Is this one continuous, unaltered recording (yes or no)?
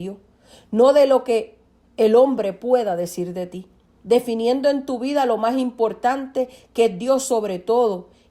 yes